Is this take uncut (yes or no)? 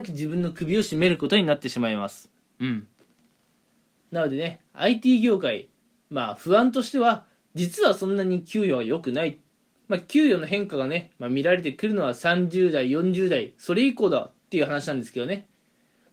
no